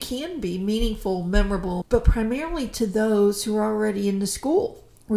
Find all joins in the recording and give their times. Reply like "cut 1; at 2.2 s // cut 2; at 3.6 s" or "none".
cut 1; at 1.8 s